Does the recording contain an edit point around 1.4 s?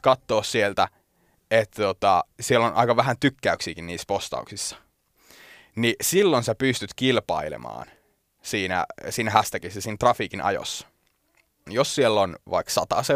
no; 1 cut; at 11.7 s

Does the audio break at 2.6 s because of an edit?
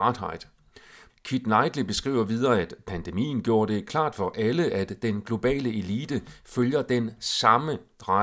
no; 1 cut; at 1.1 s

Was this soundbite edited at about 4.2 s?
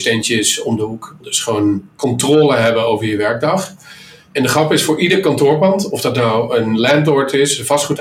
no; 1 cut; at 1.2 s

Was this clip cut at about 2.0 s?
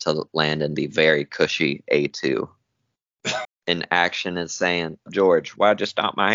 no; 2 cuts; at 3.4 s, 5.1 s

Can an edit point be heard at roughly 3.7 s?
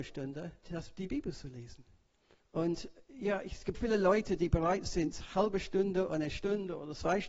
yes; 2 cuts; at 2.4 s, 3.7 s

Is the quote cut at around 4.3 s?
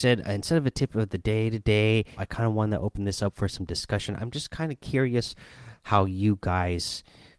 no; 1 cut; at 2.2 s

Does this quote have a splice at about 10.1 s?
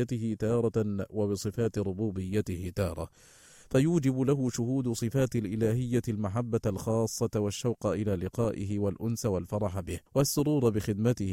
yes; 1 cut; at 10.1 s

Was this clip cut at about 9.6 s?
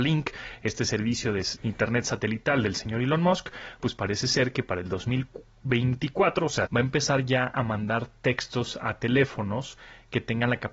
no; 3 cuts; at 1.6 s, 3.8 s, 6.7 s

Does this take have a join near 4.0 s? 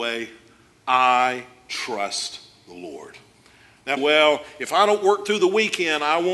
yes; 1 cut; at 4.0 s

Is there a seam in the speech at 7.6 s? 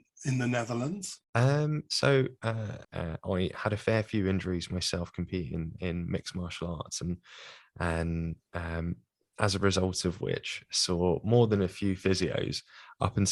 no; 2 cuts; at 1.2 s, 2.8 s

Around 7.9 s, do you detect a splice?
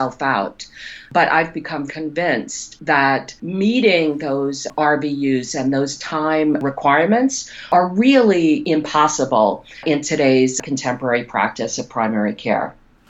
no; 1 cut; at 1.9 s

